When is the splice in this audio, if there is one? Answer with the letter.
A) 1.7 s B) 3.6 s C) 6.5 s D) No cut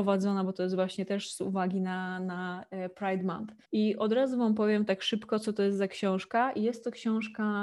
B